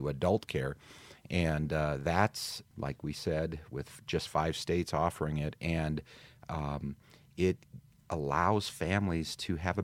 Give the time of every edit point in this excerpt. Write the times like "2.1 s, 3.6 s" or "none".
2.7 s